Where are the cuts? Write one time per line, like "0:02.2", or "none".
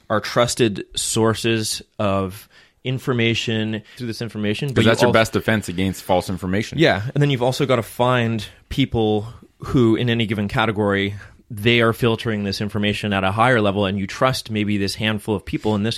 0:04.0